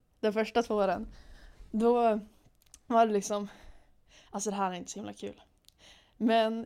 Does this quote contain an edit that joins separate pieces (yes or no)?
no